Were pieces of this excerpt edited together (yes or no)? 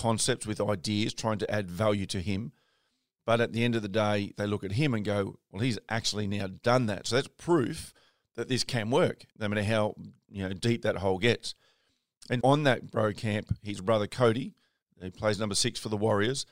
yes